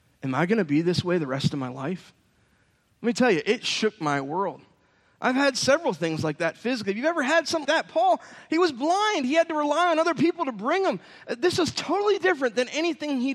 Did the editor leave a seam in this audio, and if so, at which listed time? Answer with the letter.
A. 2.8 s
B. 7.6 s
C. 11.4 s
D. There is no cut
B